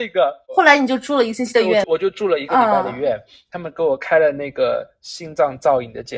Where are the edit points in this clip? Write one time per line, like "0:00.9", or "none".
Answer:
0:01.8